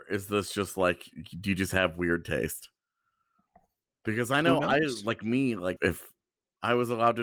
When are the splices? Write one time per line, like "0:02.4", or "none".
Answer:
0:05.8